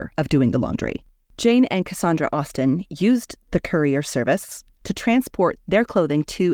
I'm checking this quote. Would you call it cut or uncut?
cut